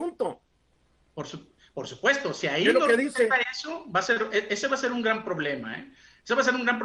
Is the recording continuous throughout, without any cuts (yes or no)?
yes